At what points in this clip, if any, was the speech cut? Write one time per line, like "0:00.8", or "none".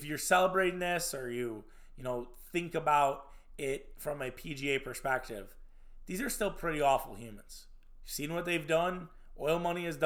0:08.0